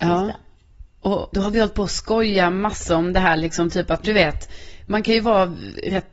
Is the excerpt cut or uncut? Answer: cut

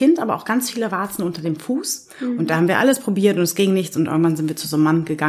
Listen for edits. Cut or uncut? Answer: uncut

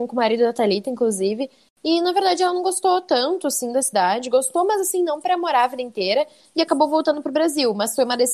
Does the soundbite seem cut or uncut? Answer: uncut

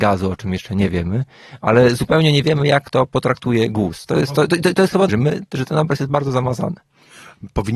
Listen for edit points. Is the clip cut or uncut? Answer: cut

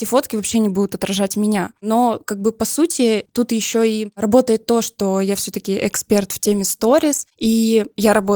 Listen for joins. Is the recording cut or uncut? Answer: uncut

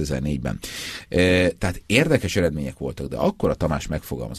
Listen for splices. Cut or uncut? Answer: uncut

